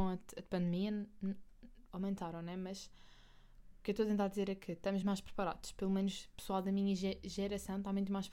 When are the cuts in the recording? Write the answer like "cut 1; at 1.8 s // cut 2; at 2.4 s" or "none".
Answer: cut 1; at 1.9 s // cut 2; at 5.0 s